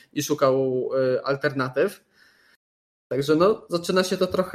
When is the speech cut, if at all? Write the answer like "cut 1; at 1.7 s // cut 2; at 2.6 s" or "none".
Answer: none